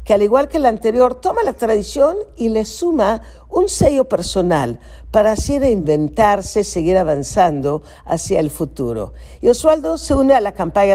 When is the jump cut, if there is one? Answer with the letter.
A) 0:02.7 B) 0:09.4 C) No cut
B